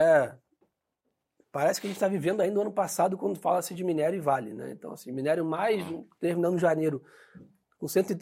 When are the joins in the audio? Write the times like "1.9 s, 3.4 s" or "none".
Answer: none

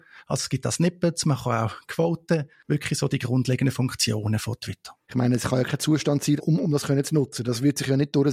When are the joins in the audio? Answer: 5.0 s, 6.4 s

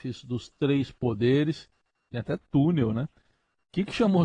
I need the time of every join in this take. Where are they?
none

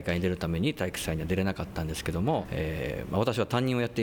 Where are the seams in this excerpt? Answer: 2.4 s

